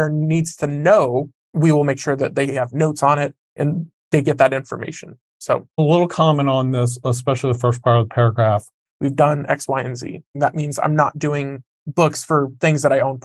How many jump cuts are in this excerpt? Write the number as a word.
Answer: three